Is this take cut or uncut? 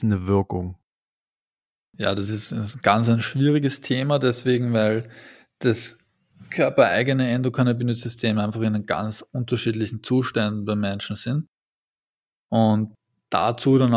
uncut